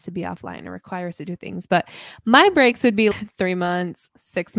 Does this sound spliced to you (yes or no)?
yes